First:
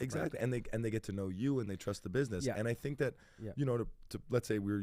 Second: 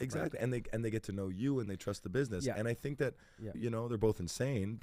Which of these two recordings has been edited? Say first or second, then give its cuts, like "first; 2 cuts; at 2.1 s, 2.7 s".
second; 1 cut; at 3.5 s